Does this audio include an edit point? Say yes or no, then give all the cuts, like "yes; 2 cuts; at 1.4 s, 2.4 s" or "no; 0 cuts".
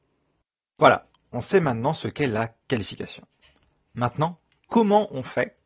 no; 0 cuts